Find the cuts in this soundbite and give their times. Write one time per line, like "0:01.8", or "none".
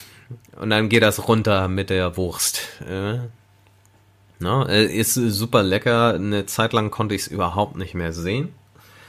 none